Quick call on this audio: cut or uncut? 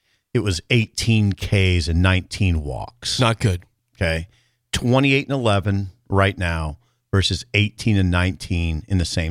uncut